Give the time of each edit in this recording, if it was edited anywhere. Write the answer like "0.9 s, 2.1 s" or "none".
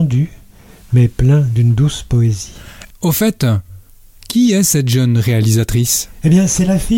2.9 s